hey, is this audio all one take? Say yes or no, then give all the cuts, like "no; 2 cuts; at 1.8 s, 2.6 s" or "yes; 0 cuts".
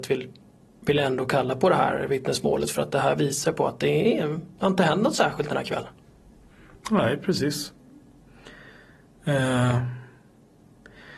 yes; 0 cuts